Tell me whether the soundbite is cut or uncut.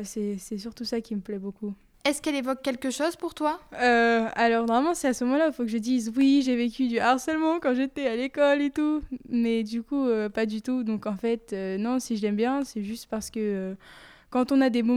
uncut